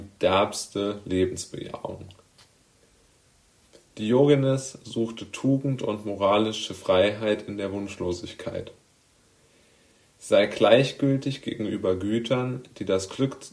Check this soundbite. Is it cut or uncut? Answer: uncut